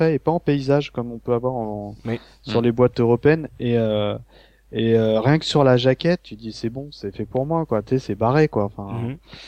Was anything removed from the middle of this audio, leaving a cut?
no; 0 cuts

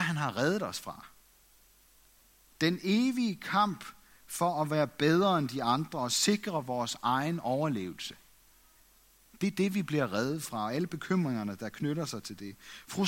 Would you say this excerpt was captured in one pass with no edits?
yes; 0 cuts

